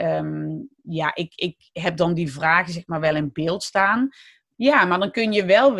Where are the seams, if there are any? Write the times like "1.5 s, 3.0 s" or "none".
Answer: 4.5 s